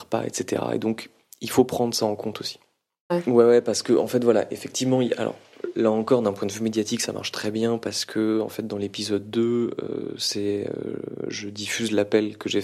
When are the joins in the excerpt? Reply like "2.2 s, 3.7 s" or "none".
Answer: 3.1 s

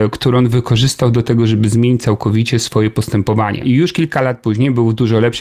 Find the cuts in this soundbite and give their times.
3.6 s

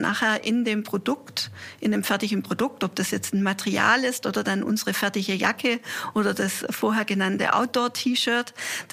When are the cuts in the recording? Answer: none

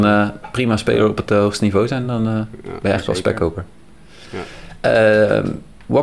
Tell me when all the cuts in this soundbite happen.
none

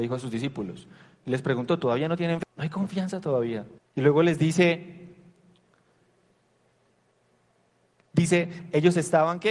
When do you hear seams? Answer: 2.4 s, 3.8 s

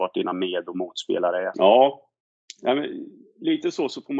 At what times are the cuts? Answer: 1.5 s

